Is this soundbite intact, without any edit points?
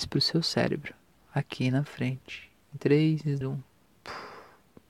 no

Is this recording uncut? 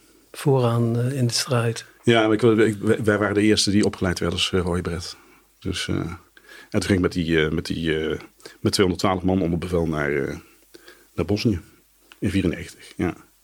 yes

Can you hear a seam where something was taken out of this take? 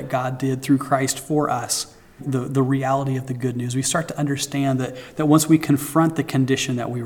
yes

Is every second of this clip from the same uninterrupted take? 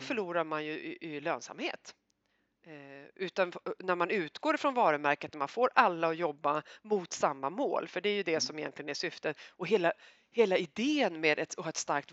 yes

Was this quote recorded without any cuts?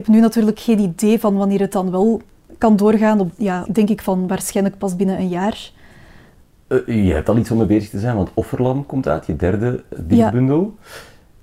no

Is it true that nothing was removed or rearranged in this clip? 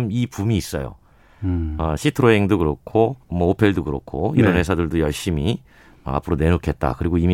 no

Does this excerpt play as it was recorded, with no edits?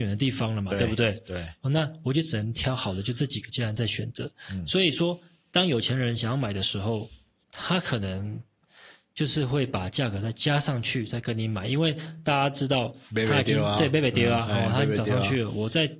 yes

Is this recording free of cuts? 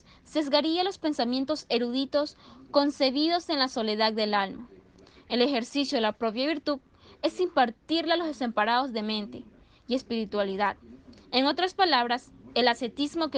yes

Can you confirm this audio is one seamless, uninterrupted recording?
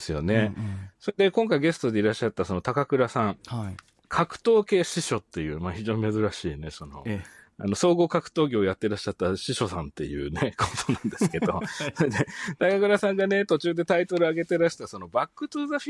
yes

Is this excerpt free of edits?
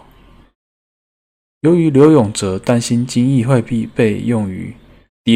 no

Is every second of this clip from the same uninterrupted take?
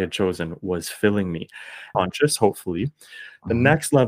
no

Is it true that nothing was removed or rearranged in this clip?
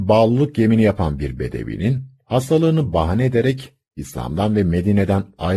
yes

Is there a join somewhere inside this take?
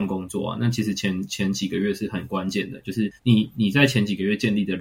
yes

